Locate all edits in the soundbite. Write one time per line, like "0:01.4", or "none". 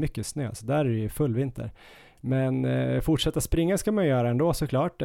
none